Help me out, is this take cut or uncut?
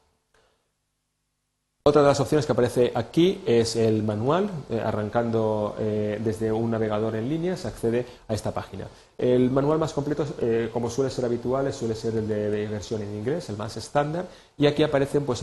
uncut